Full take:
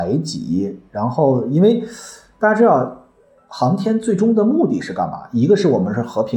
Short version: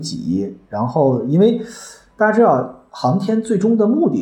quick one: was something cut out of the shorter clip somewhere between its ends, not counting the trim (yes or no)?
yes